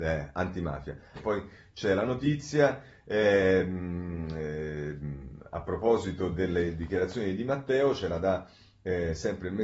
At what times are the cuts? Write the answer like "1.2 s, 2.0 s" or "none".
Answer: 1.2 s